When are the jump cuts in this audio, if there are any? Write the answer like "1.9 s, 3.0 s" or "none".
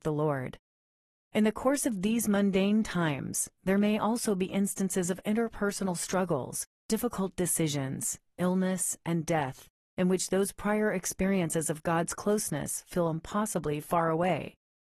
none